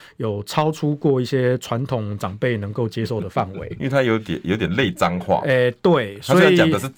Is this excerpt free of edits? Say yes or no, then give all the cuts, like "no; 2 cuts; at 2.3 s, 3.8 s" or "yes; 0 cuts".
yes; 0 cuts